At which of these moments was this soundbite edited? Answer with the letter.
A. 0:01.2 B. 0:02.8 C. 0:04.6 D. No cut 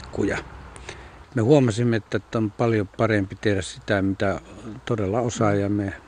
A